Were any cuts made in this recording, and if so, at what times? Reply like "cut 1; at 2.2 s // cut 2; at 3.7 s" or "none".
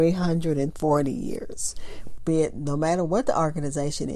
cut 1; at 2.2 s